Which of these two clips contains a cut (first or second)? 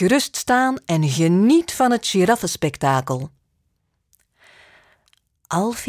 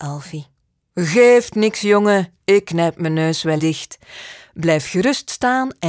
second